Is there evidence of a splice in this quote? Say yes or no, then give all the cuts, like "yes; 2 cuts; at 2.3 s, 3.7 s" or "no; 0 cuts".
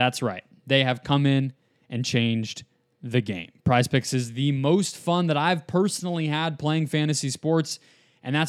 no; 0 cuts